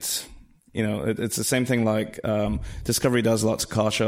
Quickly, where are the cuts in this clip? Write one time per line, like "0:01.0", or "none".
none